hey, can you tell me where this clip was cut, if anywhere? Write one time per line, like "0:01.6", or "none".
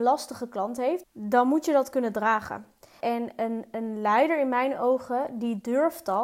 0:01.0
0:03.0